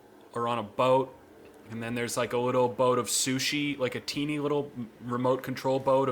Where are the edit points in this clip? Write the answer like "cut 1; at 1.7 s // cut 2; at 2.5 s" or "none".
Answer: none